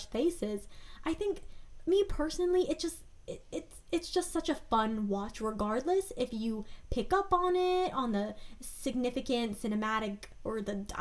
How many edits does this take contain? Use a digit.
0